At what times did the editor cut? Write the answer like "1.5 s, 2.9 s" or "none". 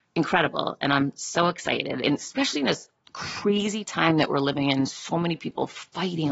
2.0 s